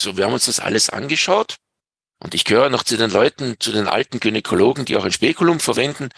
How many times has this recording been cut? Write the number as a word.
one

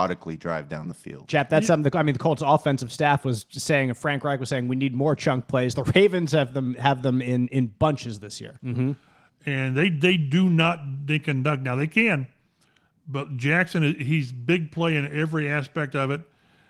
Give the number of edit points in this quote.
one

